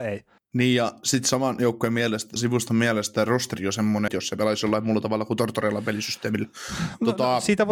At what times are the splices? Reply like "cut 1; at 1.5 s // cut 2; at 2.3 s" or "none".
cut 1; at 2.4 s // cut 2; at 4.1 s